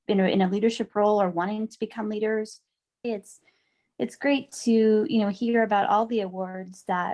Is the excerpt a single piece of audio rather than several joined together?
no; 1 cut; at 3.0 s

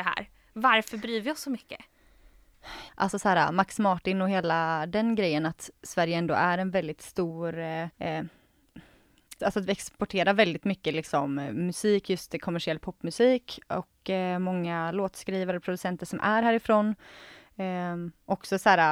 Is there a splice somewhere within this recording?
yes; 3 cuts; at 2.9 s, 7.9 s, 9.4 s

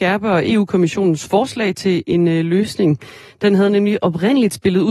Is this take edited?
no; 0 cuts

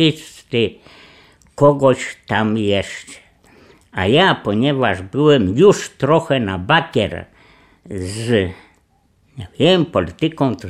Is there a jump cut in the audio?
no; 0 cuts

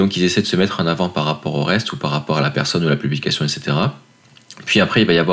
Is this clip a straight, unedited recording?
yes; 0 cuts

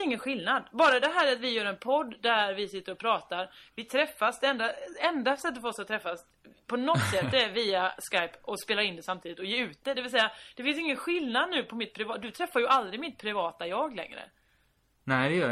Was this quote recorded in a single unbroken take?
yes; 0 cuts

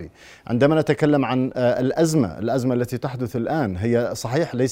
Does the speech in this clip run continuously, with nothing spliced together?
yes; 0 cuts

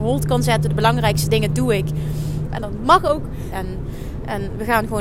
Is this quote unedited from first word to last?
no; 2 cuts; at 2.5 s, 3.5 s

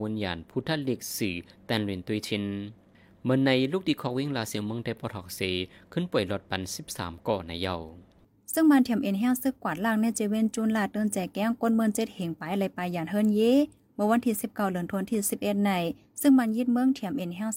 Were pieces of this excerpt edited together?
no; 0 cuts

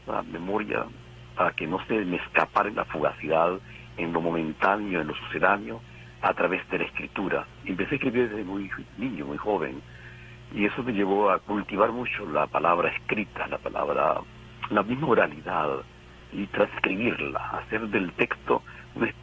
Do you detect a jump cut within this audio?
no; 0 cuts

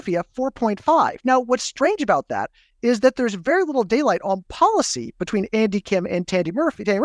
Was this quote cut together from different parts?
no; 0 cuts

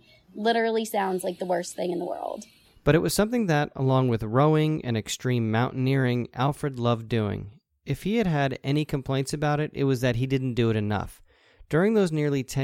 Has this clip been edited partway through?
no; 0 cuts

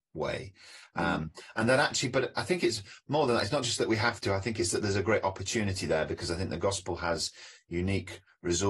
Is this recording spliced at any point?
no; 0 cuts

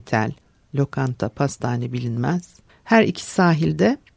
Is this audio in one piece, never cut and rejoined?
no; 1 cut; at 2.7 s

